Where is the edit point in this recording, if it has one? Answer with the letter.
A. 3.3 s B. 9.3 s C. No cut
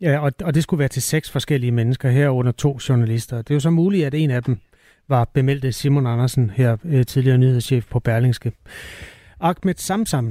C